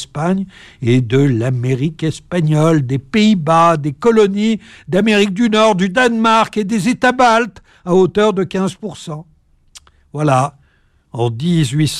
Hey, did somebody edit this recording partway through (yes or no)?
no